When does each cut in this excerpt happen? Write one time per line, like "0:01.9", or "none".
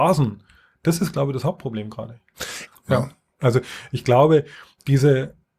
0:02.7